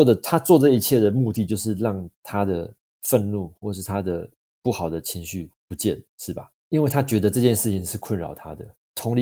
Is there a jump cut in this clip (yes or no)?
no